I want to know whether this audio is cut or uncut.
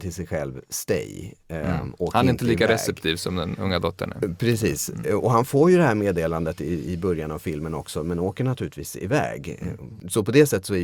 uncut